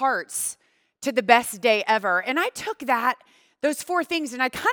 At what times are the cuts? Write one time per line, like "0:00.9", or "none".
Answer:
none